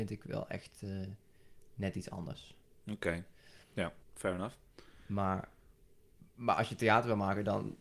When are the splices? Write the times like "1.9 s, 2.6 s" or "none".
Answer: 4.0 s